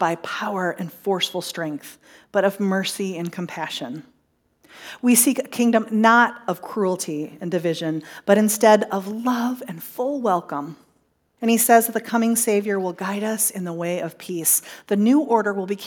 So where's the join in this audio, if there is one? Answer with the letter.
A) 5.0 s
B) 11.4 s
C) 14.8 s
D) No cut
B